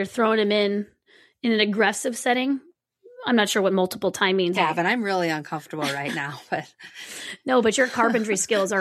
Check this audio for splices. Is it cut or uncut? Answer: cut